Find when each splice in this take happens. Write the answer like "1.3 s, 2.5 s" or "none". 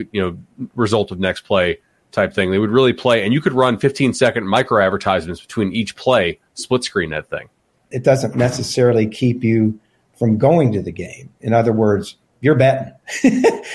7.9 s